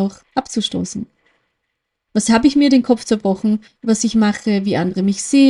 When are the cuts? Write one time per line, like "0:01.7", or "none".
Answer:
0:02.1
0:03.7